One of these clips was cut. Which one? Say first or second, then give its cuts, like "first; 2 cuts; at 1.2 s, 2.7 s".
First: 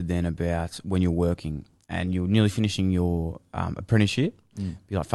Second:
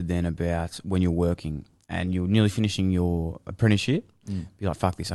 second; 1 cut; at 3.5 s